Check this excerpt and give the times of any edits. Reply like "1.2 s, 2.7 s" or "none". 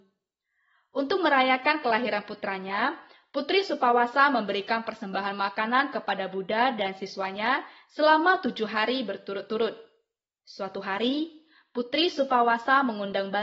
10.4 s